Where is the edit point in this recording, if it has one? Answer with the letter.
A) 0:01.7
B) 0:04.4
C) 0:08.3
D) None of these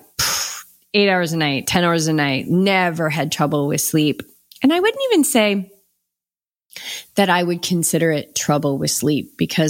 A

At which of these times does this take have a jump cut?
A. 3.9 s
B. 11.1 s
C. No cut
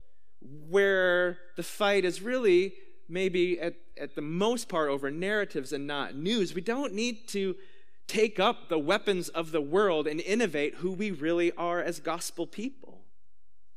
C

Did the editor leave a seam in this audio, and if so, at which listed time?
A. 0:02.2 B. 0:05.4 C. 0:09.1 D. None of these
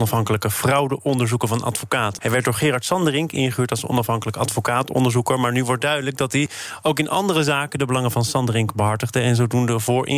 A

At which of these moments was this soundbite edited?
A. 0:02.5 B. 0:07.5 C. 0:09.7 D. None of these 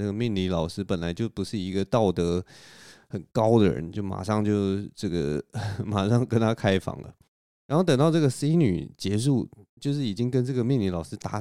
D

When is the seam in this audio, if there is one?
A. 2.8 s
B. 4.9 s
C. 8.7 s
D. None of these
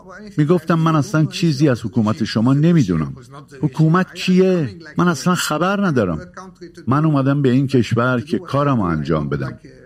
B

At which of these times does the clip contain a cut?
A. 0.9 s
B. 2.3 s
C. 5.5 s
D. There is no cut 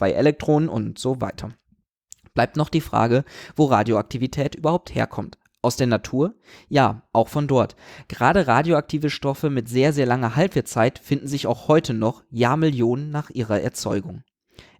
D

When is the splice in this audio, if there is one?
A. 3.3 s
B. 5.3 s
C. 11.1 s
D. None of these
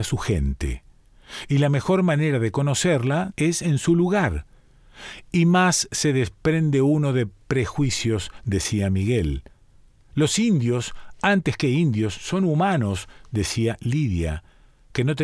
A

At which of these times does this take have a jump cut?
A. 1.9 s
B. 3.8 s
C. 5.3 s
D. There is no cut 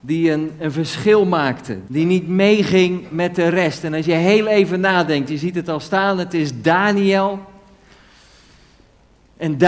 A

